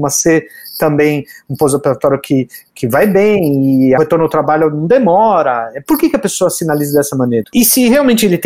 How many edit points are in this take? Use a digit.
1